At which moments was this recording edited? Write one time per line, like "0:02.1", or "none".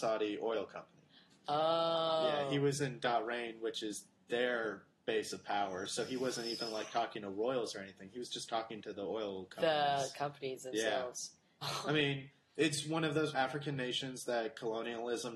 0:11.6
0:13.3